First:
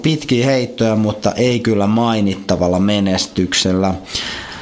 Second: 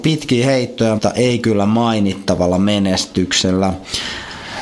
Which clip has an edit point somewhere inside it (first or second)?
second